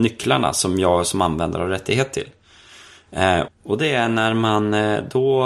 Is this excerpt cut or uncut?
cut